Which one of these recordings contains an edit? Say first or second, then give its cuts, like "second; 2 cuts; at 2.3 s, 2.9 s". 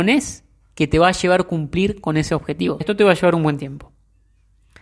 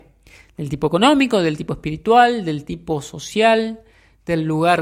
first; 1 cut; at 2.8 s